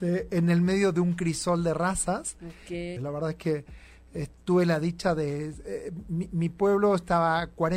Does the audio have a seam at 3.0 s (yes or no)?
yes